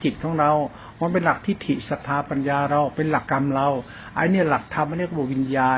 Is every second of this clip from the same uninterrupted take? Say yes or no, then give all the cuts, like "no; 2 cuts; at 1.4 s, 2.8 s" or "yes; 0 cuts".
no; 1 cut; at 3.3 s